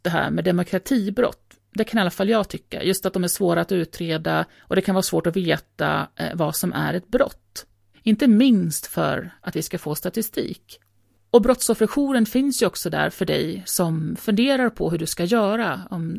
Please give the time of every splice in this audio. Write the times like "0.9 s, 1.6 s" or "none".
4.5 s, 7.9 s